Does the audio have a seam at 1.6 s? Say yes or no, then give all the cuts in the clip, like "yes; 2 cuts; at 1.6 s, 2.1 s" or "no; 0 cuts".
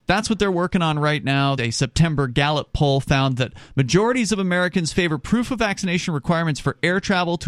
yes; 1 cut; at 1.6 s